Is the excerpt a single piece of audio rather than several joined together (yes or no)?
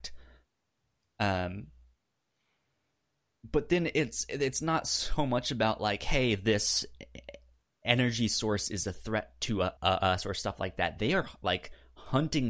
no